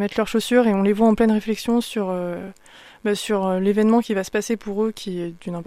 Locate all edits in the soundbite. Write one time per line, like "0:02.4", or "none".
none